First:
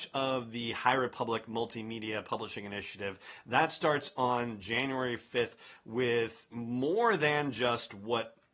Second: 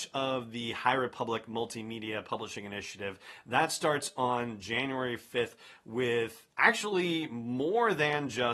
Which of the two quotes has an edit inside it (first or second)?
first